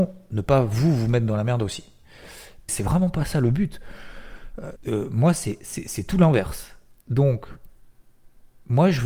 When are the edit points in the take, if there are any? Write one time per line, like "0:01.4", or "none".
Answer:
0:02.7
0:04.8